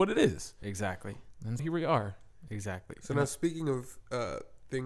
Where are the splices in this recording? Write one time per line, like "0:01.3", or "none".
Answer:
0:01.6